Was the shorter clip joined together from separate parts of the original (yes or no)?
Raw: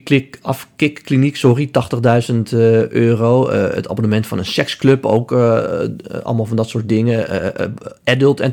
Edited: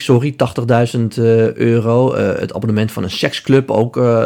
no